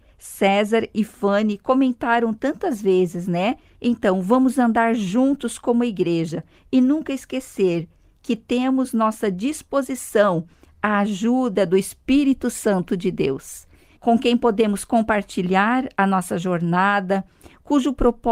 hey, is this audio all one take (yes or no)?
no